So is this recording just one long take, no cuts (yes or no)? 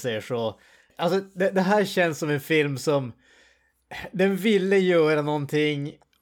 yes